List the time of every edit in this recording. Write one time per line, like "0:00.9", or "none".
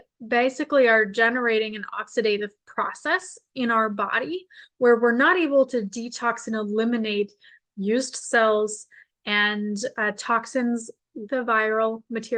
0:11.3